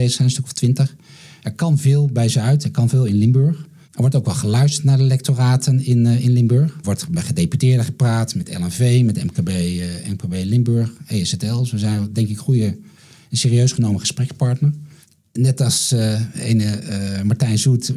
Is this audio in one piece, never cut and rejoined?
yes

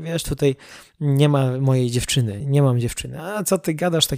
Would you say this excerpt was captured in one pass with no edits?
no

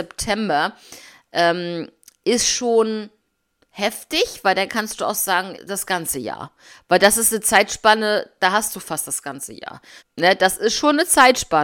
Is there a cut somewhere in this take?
yes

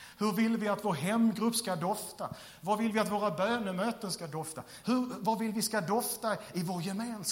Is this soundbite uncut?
no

